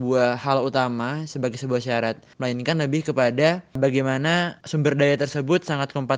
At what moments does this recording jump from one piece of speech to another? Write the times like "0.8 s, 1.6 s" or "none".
none